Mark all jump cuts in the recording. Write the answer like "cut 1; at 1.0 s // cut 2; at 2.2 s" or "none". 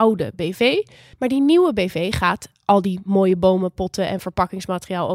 cut 1; at 1.1 s